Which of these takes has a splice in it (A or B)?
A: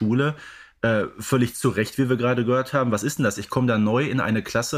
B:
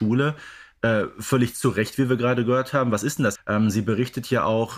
B